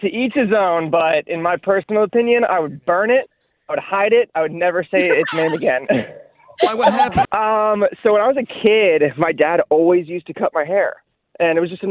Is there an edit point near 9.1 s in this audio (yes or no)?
no